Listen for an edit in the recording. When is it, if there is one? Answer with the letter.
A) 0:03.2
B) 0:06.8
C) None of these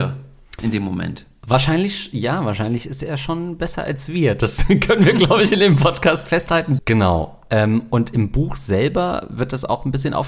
B